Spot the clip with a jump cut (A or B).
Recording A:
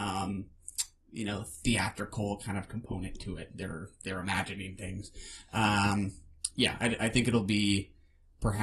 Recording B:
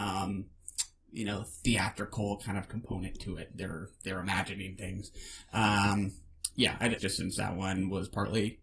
B